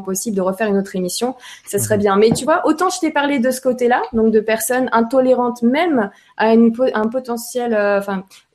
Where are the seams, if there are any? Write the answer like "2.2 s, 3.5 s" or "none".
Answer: none